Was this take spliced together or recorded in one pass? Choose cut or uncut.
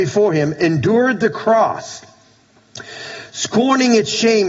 uncut